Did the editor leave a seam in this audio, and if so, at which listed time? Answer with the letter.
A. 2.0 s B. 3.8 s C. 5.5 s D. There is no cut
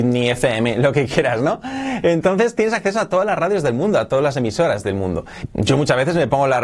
C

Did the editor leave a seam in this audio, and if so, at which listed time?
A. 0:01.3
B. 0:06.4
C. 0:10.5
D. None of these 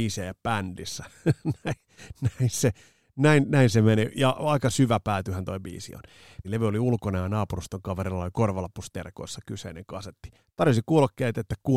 B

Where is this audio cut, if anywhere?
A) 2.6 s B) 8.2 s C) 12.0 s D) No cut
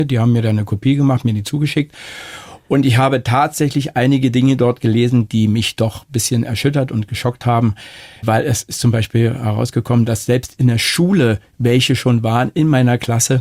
D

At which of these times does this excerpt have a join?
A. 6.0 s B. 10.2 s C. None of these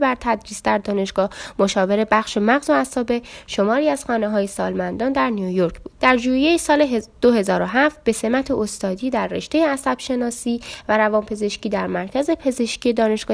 A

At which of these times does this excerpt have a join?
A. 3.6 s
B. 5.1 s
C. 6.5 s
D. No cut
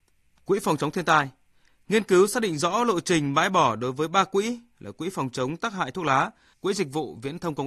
C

